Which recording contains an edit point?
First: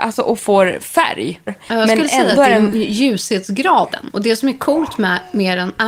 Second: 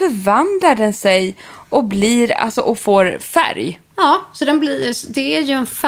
first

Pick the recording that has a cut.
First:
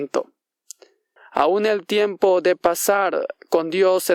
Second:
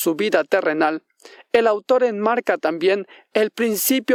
first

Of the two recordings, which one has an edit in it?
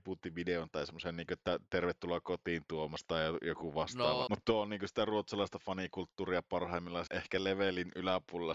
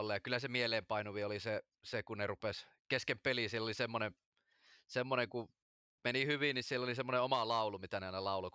first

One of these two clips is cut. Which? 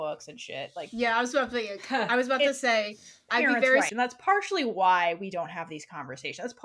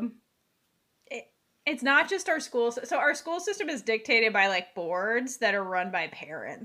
first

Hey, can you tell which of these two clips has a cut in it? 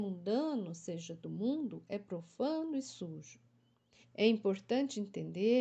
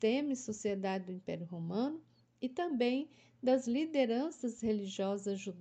first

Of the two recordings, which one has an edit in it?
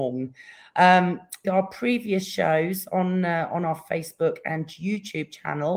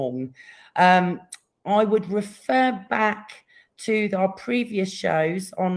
first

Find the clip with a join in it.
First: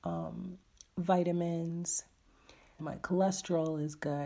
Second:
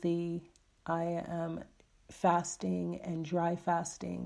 first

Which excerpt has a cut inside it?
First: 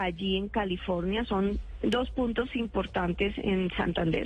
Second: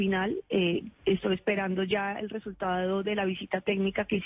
second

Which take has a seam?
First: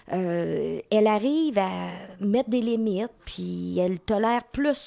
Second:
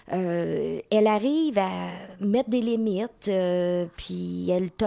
first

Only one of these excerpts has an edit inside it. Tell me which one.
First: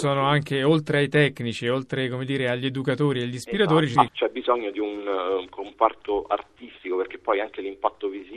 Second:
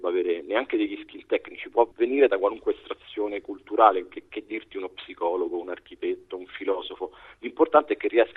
first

